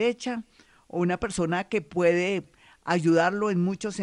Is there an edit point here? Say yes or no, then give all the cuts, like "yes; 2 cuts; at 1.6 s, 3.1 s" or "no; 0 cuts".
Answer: no; 0 cuts